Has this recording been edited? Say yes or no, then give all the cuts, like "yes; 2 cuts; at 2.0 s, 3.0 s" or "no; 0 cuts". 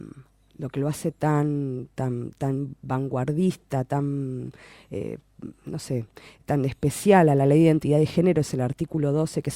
no; 0 cuts